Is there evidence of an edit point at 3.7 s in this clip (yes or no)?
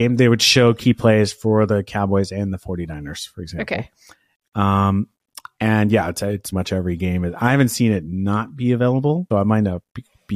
no